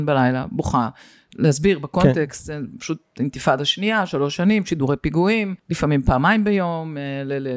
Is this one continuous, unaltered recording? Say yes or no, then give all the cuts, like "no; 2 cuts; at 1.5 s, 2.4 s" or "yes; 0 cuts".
no; 1 cut; at 5.6 s